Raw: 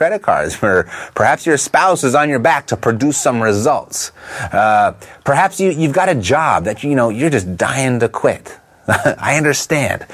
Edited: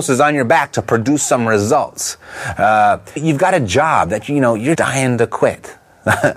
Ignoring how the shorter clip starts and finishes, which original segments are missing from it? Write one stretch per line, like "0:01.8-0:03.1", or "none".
0:05.1-0:05.7
0:07.3-0:07.6